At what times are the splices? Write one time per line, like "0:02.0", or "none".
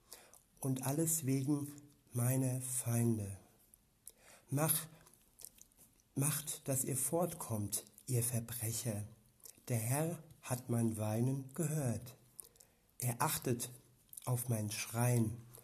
none